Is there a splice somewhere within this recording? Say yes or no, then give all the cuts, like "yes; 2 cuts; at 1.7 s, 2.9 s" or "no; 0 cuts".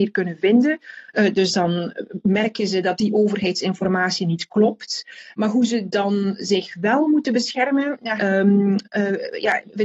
yes; 1 cut; at 8.2 s